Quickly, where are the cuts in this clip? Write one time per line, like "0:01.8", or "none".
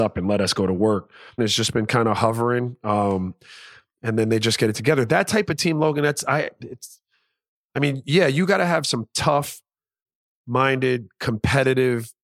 0:01.4

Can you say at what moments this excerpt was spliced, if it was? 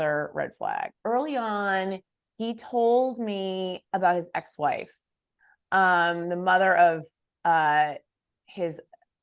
none

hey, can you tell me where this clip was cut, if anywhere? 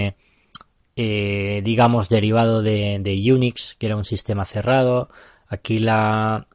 none

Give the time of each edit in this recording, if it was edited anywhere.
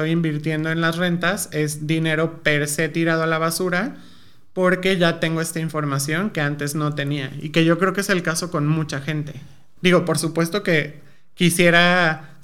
0:09.8

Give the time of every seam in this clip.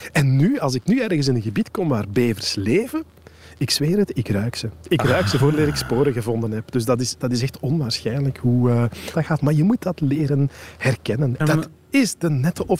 0:09.1
0:11.4

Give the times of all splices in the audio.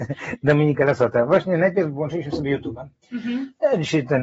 none

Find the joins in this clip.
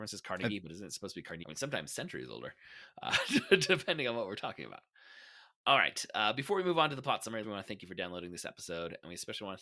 0:01.4
0:07.4

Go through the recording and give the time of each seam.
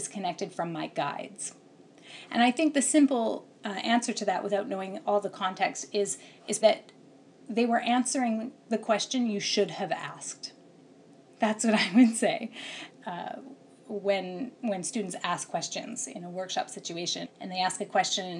0:06.6
0:12.9
0:17.2

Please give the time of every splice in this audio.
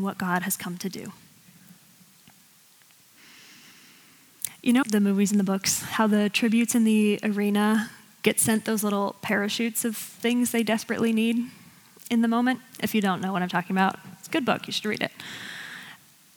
0:04.8

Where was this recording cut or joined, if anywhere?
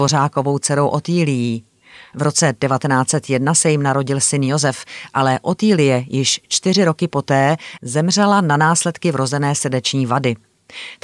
none

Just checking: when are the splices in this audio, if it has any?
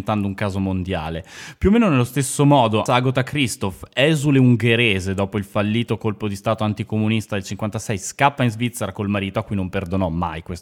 0:02.9

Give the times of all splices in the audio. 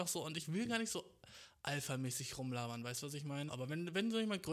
0:03.5

